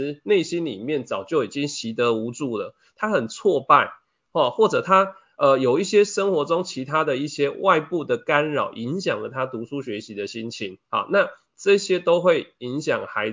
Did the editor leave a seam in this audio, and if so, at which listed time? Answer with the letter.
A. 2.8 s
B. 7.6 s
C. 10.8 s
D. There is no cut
C